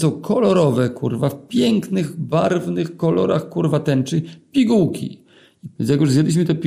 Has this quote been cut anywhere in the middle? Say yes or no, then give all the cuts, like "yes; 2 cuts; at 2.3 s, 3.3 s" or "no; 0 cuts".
yes; 1 cut; at 5.8 s